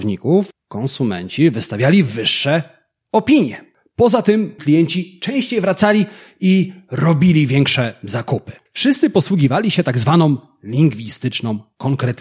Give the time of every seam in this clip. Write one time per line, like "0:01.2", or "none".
0:04.6
0:08.7